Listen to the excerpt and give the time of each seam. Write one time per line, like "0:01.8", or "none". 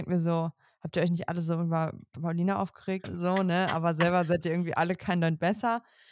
0:03.0